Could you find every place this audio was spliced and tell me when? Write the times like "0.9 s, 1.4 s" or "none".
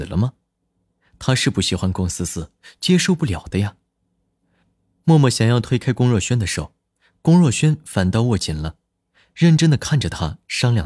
none